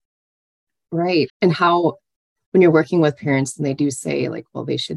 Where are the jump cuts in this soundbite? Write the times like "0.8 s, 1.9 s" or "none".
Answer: 1.3 s